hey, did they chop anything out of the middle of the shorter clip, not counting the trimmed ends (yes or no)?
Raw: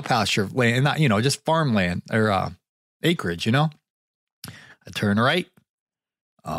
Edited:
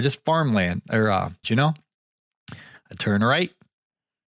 yes